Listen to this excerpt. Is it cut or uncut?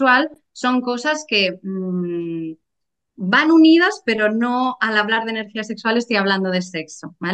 uncut